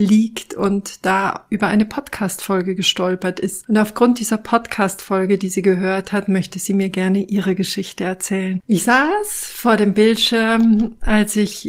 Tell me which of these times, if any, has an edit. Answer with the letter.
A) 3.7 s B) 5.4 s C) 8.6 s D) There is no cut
D